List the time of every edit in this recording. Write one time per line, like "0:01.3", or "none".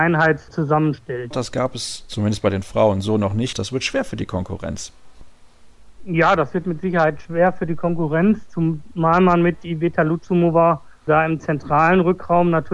0:01.3
0:03.5